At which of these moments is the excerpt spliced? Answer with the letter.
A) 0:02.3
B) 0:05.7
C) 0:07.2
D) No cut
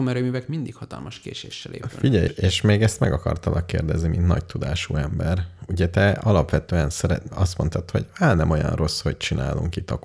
A